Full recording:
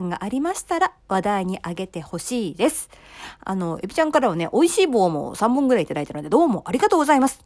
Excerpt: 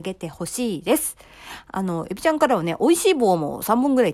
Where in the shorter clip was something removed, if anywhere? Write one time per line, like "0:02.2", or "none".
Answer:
none

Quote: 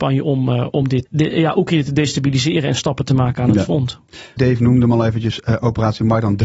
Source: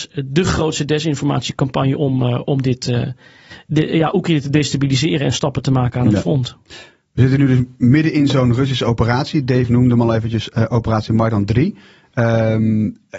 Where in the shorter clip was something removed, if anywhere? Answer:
0:01.1
0:04.4

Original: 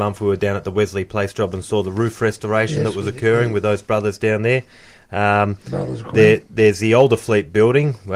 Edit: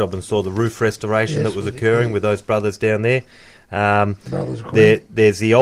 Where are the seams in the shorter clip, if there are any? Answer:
none

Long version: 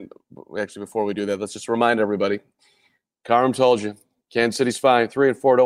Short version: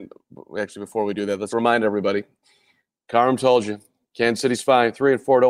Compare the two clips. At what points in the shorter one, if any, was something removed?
0:01.5

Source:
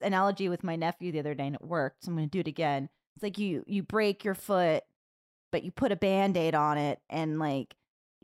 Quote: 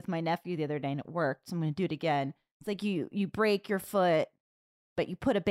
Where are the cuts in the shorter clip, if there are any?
none

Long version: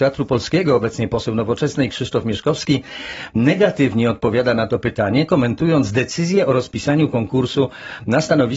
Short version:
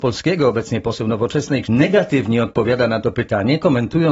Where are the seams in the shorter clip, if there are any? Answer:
0:01.6

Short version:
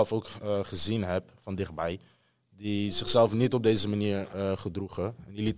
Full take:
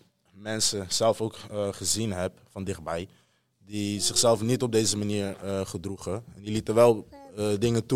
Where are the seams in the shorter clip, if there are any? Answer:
none

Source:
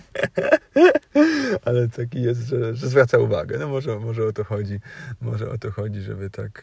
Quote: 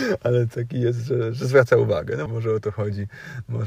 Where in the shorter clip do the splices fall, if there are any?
0:02.3

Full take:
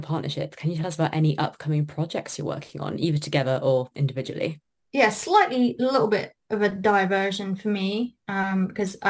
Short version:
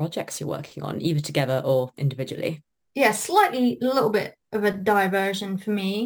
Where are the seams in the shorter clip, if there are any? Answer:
none

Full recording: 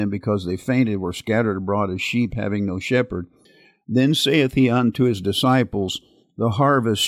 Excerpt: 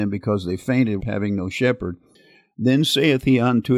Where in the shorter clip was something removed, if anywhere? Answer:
0:01.0

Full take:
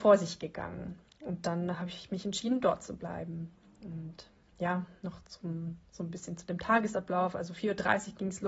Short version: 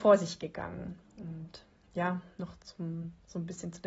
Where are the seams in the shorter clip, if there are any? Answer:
0:01.0

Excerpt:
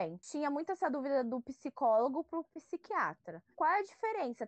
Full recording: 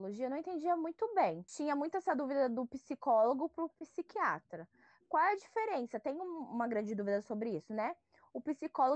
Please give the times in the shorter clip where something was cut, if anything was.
0:03.5

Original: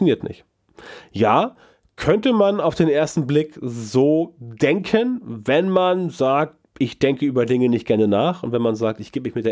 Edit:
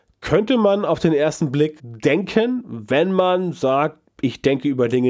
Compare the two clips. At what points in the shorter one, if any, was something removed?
0:01.8

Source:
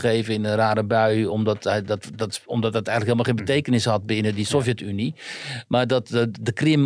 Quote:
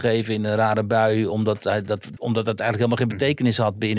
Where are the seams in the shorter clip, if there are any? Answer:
0:02.2

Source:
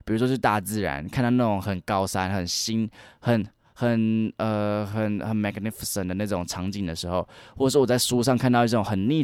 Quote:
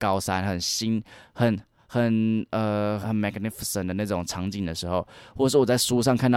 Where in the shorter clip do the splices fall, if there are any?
0:03.0

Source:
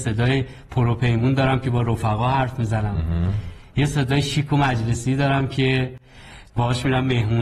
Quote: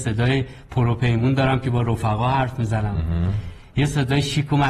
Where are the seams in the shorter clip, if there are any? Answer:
none

